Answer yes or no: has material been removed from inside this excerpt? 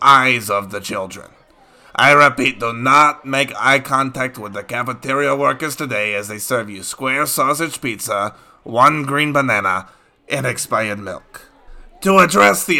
no